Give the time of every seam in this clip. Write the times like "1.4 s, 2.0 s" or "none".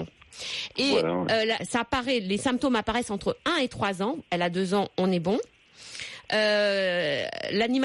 1.6 s